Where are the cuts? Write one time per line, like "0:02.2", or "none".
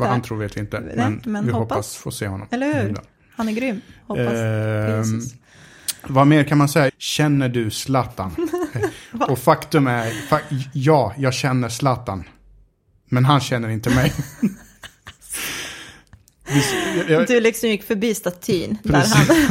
0:06.9